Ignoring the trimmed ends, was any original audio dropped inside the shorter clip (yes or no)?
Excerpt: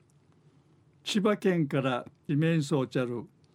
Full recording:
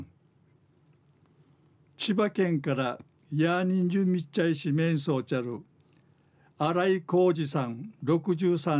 yes